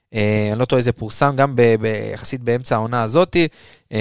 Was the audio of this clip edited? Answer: no; 0 cuts

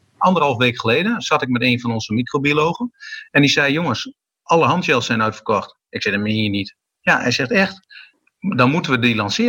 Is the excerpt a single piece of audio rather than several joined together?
yes; 0 cuts

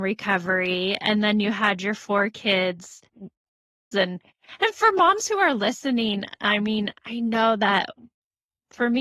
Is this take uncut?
no; 1 cut; at 3.9 s

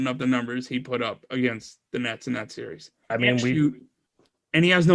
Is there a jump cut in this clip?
yes; 1 cut; at 3.1 s

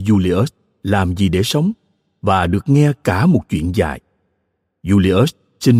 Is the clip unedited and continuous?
yes; 0 cuts

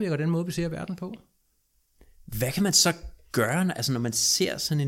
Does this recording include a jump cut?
no; 0 cuts

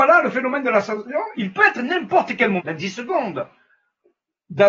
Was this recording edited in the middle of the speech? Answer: yes; 2 cuts; at 1.3 s, 2.6 s

